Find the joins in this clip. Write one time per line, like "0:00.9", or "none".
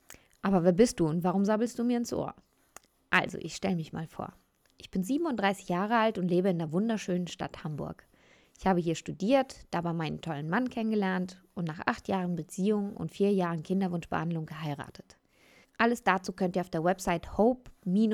0:15.6